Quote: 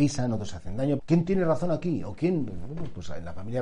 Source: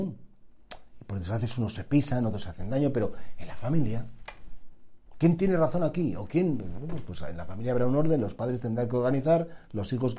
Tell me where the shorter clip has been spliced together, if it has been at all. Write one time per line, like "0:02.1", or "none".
0:01.0